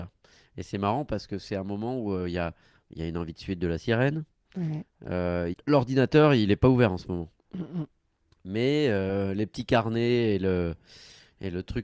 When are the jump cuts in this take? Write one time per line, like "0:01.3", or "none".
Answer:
0:05.5